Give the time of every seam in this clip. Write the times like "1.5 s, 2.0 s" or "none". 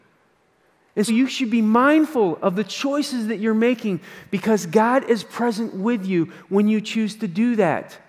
1.1 s